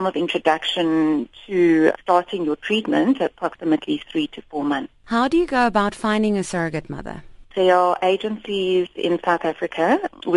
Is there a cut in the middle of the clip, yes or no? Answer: yes